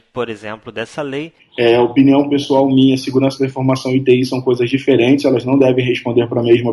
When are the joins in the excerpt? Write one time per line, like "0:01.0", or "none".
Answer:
0:01.4